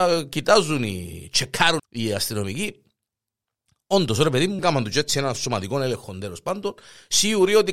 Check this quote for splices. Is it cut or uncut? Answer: cut